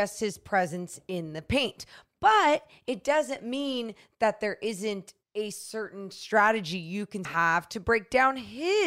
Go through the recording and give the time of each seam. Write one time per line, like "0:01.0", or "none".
0:05.2
0:07.2